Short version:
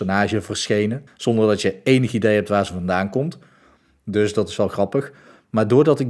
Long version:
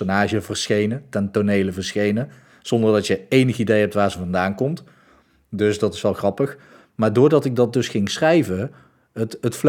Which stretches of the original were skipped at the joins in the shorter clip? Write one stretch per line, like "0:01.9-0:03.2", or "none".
0:01.1-0:02.5